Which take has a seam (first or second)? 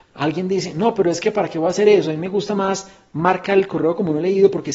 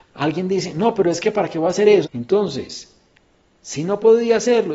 second